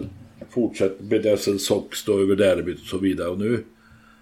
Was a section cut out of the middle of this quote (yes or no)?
no